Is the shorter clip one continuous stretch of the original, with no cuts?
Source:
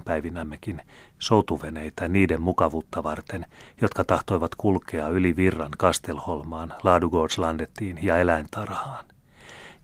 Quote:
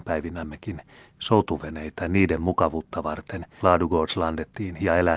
no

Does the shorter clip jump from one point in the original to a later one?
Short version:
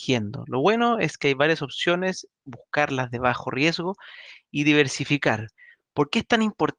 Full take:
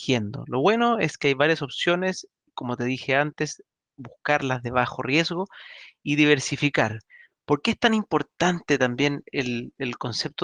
yes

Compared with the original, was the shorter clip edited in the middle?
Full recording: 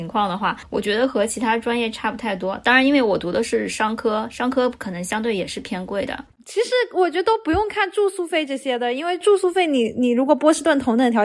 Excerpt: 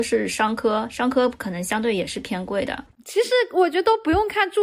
no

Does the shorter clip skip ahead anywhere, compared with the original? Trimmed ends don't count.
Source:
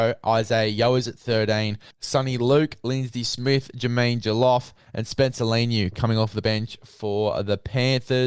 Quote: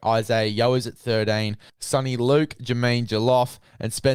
yes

